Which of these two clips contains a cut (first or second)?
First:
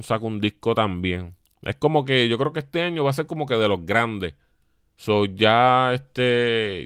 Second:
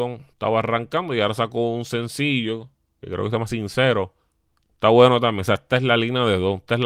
first